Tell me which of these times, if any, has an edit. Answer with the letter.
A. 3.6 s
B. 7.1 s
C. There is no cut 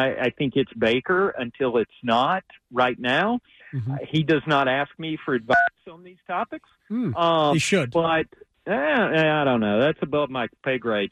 A